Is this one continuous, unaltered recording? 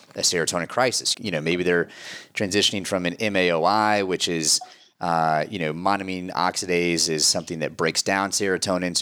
no; 1 cut; at 1.1 s

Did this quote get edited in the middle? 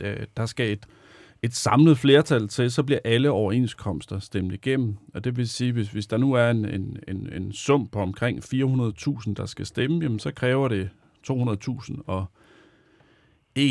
no; 0 cuts

